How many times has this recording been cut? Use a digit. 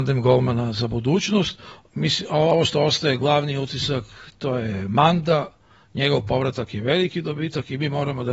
1